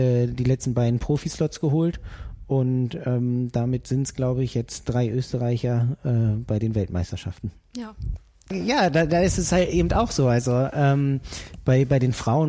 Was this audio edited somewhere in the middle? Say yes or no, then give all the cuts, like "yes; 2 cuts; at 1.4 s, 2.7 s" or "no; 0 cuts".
no; 0 cuts